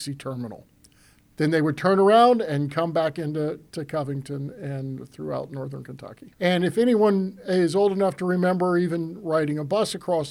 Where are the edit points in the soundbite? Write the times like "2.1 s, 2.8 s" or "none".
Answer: 6.3 s

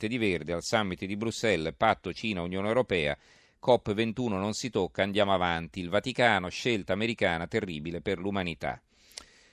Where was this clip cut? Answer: none

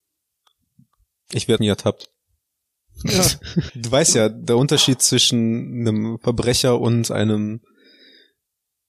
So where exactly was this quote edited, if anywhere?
1.6 s, 3.7 s

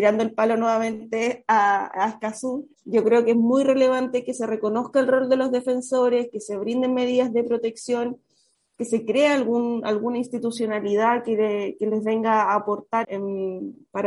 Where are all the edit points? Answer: 2.7 s, 13.0 s

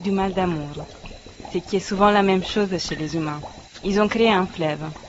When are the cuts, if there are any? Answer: 3.8 s

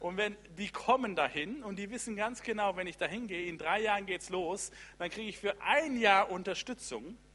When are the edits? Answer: none

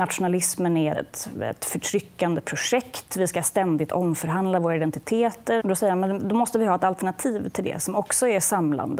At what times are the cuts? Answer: 0.9 s, 5.6 s

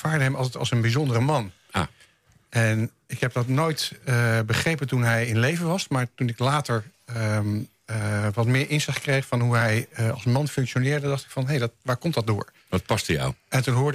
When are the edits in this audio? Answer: none

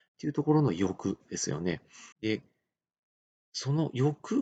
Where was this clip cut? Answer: 2.1 s

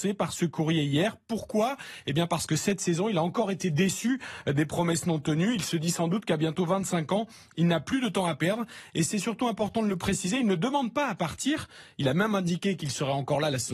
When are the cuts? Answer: none

